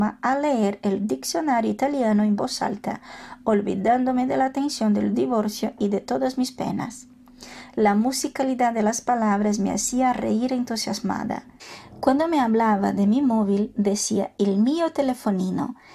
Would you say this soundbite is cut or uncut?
uncut